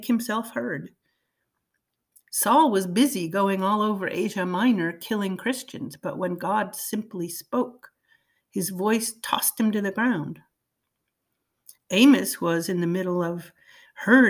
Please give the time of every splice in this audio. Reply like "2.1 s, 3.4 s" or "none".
11.8 s